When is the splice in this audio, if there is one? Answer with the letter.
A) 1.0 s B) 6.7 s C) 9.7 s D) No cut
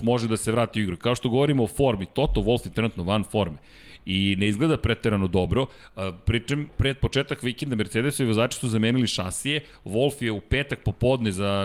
B